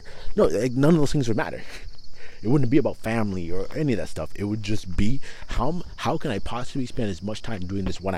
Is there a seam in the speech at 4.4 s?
no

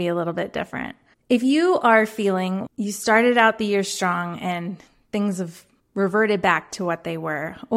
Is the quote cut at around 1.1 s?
no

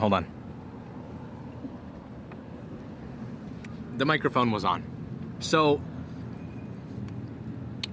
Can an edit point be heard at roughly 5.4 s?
yes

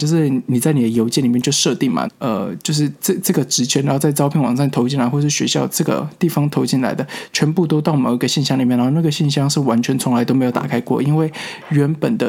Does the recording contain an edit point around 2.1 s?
yes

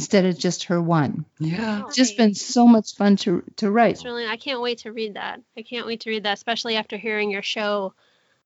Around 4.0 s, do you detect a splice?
yes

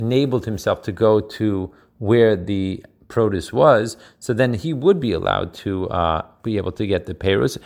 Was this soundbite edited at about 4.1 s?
no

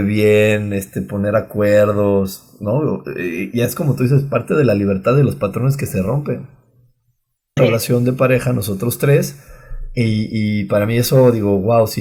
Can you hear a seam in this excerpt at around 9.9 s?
no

